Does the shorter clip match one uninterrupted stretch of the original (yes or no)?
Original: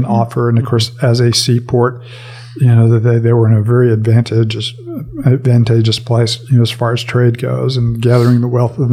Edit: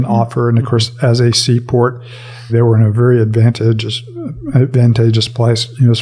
no